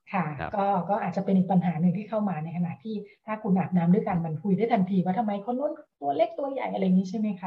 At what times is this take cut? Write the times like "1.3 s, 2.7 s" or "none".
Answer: none